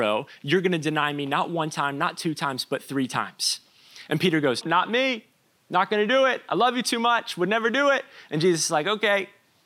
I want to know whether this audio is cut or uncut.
cut